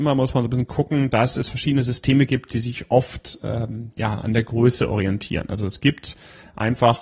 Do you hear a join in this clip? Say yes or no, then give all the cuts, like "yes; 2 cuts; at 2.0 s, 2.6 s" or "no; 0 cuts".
no; 0 cuts